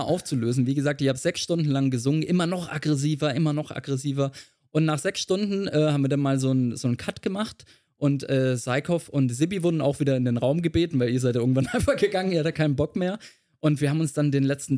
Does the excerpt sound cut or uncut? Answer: uncut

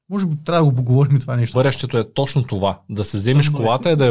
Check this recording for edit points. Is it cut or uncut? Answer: cut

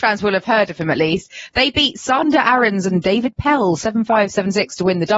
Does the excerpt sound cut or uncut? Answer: uncut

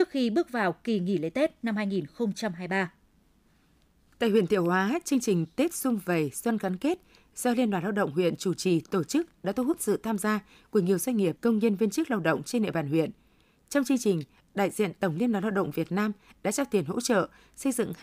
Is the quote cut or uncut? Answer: cut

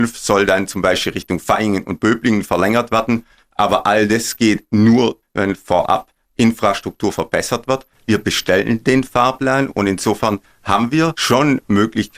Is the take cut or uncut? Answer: cut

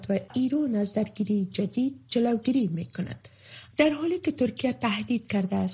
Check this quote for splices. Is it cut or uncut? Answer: cut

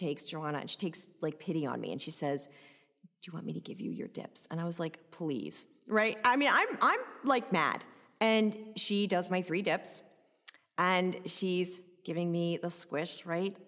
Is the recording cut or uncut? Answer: uncut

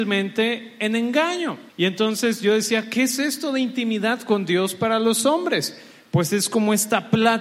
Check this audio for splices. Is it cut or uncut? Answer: cut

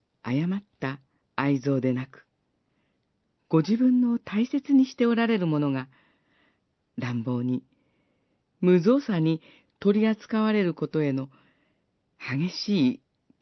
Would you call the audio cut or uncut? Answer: uncut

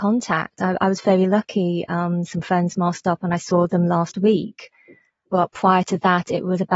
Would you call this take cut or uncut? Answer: uncut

